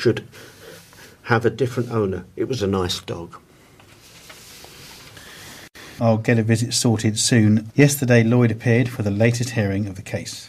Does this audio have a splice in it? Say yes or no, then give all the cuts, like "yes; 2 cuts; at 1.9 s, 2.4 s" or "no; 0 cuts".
yes; 3 cuts; at 2.6 s, 6.0 s, 7.7 s